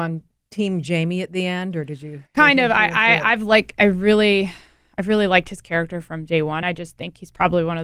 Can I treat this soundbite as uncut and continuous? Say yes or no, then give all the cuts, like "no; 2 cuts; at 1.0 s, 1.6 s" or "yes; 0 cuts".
yes; 0 cuts